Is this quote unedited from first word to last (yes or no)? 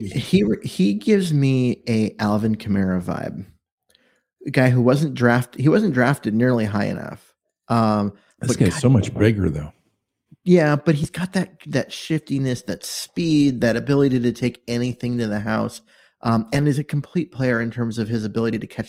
yes